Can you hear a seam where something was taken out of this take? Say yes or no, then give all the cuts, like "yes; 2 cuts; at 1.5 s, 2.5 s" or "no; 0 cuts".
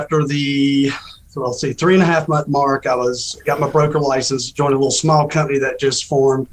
no; 0 cuts